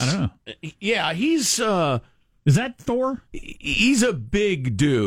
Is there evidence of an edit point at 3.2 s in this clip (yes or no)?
yes